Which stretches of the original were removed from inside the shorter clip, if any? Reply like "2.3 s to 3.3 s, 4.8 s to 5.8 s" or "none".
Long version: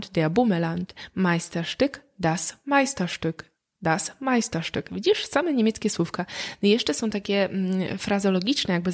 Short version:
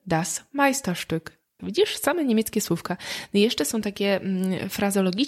3.7 s to 4.9 s